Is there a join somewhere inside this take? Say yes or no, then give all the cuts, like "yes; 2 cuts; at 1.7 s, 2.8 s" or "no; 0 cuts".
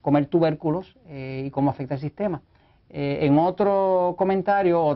no; 0 cuts